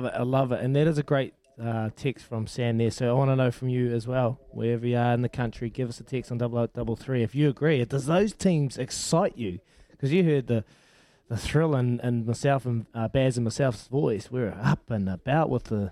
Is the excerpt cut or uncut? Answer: uncut